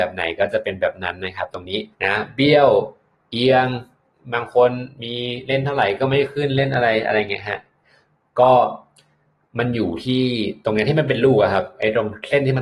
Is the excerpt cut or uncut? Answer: cut